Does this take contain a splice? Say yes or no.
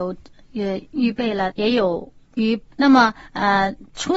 yes